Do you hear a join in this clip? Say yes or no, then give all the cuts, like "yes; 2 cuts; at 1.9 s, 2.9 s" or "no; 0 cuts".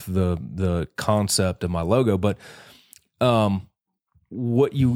no; 0 cuts